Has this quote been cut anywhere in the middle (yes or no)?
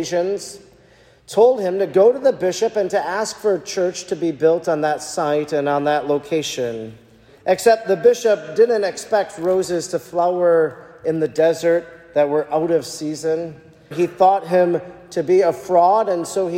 yes